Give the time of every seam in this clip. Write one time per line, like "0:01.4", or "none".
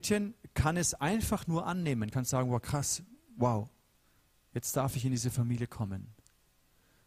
none